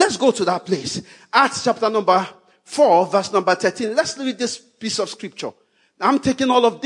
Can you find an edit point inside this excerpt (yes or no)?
no